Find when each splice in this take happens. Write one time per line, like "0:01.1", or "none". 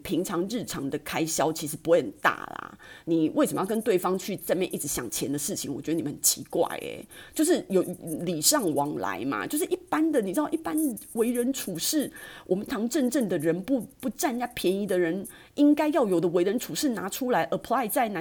0:12.7